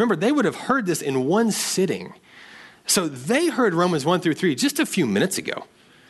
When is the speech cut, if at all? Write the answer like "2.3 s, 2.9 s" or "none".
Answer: none